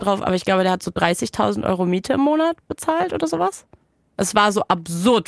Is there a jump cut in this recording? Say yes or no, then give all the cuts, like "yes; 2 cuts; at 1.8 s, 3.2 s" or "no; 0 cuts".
no; 0 cuts